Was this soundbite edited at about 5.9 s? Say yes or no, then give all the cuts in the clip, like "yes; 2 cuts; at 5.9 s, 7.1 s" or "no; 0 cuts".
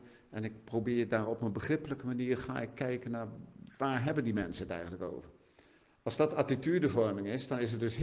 no; 0 cuts